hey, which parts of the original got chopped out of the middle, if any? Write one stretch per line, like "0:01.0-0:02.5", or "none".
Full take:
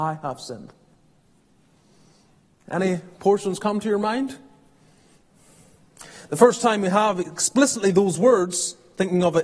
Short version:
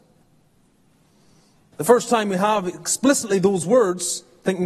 0:02.4-0:06.2